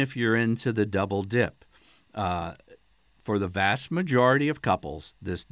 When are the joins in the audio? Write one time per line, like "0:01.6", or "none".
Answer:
none